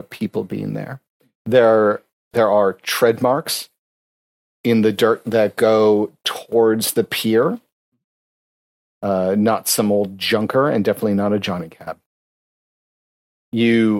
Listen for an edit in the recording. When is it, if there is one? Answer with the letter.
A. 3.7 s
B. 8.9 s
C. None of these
B